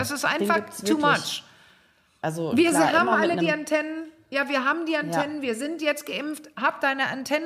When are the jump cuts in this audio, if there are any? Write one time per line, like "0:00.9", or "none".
0:02.2